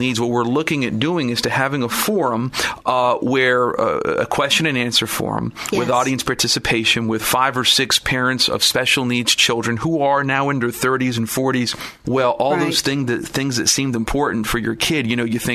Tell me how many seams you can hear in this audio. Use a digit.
1